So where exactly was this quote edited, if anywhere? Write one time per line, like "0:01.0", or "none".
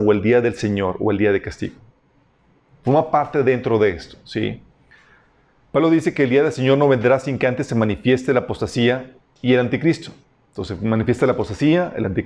none

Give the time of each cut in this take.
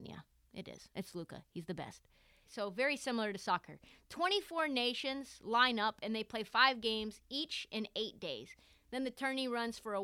0:02.5

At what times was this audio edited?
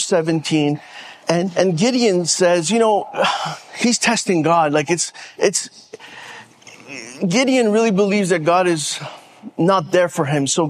0:01.2

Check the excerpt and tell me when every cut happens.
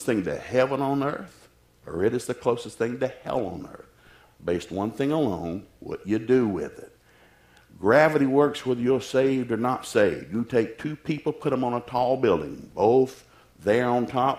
none

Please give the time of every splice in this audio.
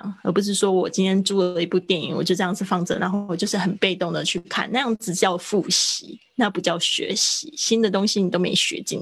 none

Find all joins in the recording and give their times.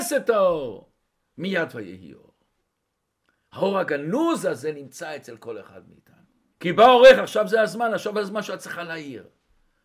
0:06.5

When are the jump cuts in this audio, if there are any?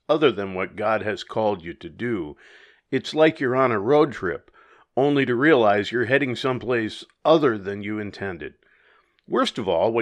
none

